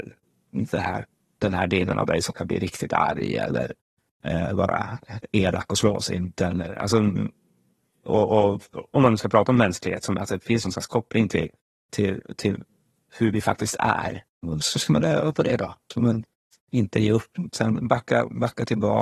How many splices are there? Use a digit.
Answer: 2